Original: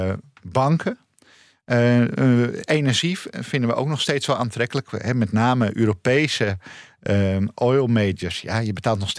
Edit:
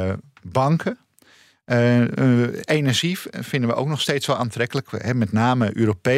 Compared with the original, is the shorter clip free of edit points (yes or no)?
yes